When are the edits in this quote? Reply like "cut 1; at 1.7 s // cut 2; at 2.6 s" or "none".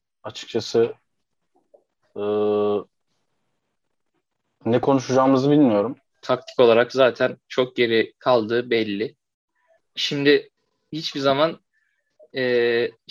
cut 1; at 6.2 s // cut 2; at 9.8 s